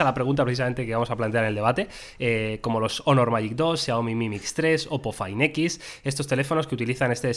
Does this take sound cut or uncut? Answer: uncut